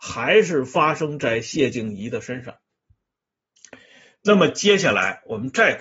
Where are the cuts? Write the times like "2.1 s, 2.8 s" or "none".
4.2 s